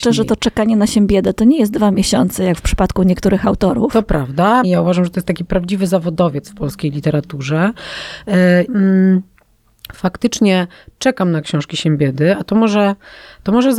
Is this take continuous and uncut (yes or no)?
no